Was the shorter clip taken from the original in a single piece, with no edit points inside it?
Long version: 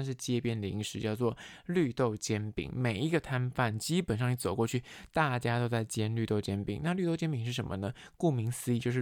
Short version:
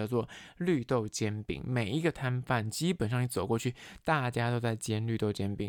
yes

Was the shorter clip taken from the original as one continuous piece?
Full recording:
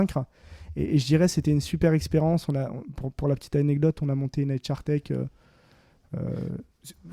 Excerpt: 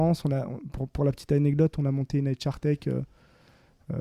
yes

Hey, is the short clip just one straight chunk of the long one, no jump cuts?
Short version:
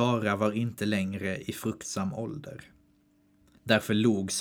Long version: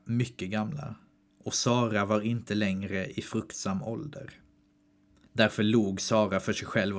yes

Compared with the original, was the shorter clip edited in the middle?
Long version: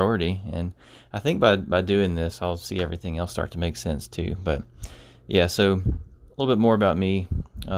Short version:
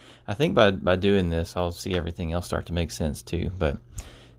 no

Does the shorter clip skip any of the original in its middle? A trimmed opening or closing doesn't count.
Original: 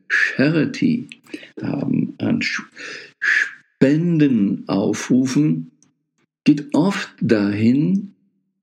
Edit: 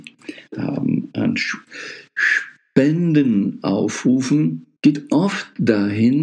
yes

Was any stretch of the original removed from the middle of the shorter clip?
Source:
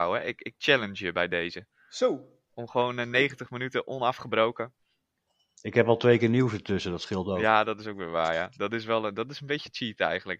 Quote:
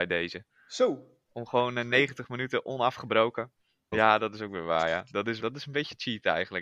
yes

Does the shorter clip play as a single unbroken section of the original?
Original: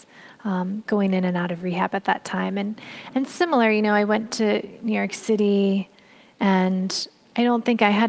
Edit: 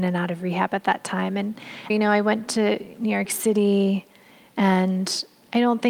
no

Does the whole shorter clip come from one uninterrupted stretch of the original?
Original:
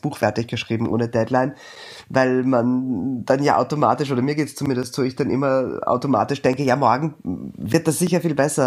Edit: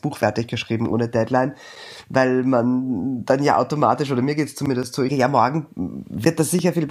no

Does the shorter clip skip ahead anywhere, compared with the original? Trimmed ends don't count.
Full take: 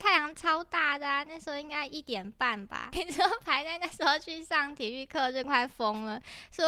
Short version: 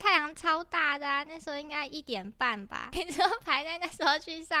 no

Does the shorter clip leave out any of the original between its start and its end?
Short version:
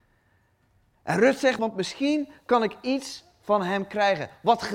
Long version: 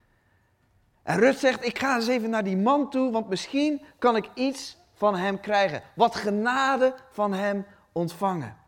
yes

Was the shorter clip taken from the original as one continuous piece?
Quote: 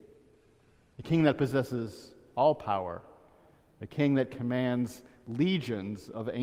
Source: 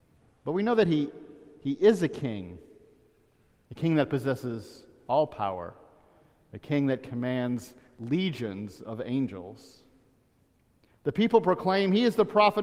yes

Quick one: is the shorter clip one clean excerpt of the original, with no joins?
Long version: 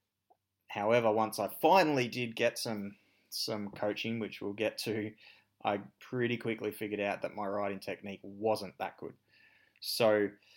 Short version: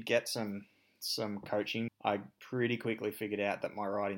no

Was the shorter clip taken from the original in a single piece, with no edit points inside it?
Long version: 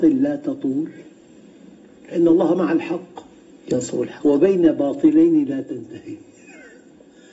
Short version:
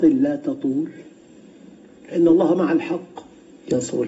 yes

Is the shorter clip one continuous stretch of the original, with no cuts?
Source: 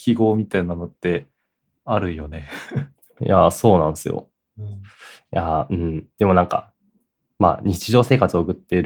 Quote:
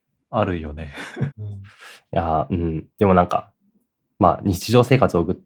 no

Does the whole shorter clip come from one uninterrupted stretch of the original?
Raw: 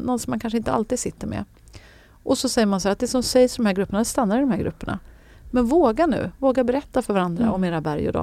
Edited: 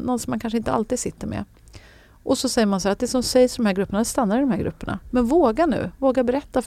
no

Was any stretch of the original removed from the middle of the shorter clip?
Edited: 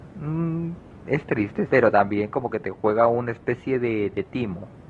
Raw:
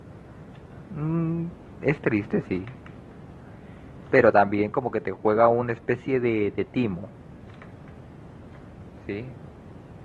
yes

